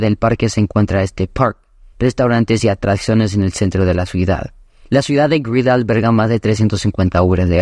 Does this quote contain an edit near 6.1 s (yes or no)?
no